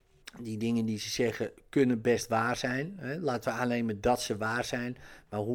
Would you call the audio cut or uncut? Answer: uncut